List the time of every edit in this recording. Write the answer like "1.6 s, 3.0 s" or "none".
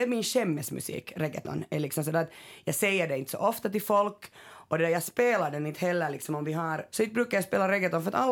6.9 s